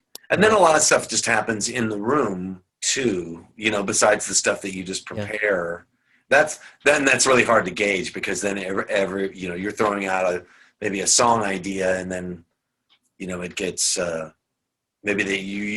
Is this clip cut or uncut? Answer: uncut